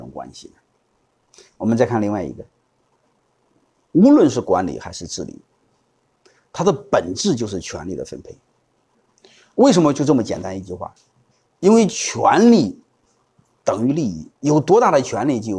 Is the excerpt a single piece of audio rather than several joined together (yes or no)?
yes